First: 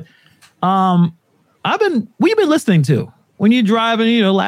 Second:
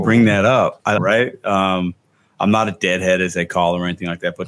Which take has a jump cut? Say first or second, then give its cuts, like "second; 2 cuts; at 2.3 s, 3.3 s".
second; 1 cut; at 1.0 s